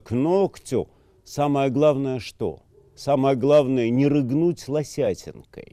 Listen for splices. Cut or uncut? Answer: uncut